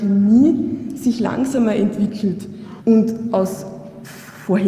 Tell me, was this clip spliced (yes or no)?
yes